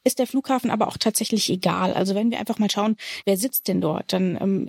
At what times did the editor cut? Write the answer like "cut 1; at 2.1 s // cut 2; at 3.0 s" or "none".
none